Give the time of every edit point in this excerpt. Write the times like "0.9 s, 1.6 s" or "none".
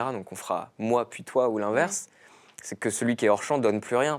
none